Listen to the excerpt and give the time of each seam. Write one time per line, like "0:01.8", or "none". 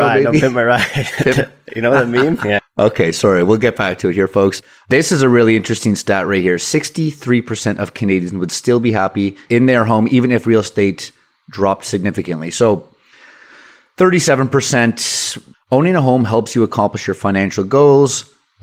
0:02.6
0:15.5